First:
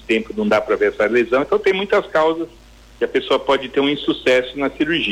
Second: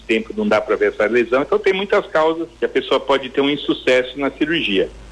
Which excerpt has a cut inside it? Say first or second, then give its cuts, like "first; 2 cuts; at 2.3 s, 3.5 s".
second; 1 cut; at 2.5 s